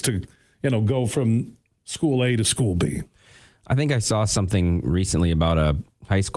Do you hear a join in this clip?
no; 0 cuts

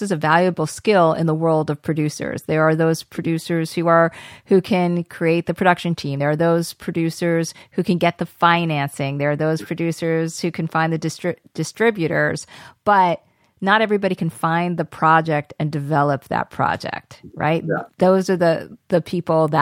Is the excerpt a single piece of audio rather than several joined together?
yes; 0 cuts

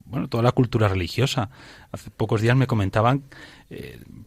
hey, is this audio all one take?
yes; 0 cuts

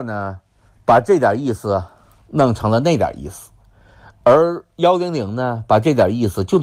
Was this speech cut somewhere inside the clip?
no; 0 cuts

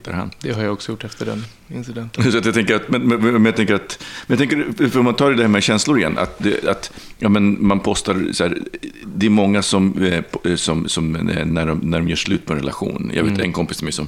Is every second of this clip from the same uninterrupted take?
yes; 0 cuts

